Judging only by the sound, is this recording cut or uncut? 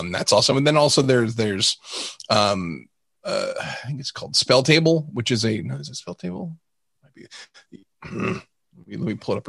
uncut